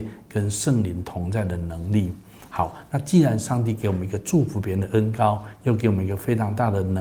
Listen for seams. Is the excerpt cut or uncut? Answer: uncut